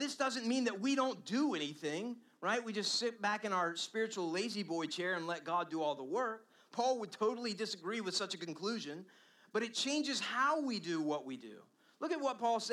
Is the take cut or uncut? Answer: uncut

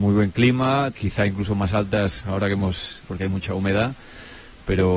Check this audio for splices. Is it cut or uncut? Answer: cut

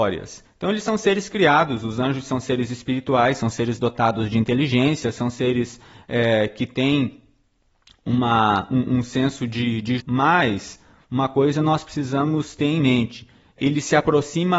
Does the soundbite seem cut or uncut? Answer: cut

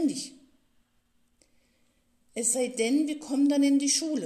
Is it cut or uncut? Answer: uncut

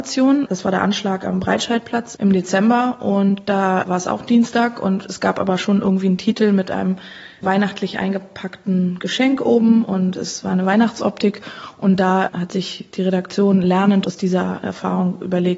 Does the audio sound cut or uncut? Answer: uncut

